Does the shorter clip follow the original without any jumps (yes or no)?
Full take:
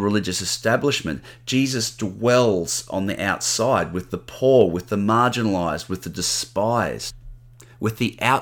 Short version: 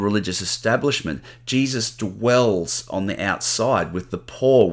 yes